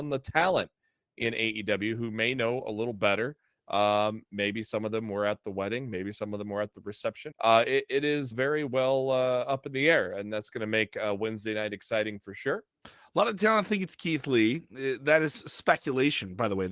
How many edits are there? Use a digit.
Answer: 3